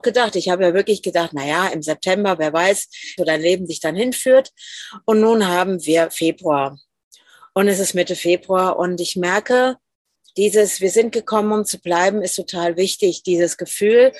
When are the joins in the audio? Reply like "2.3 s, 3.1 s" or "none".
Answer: 3.2 s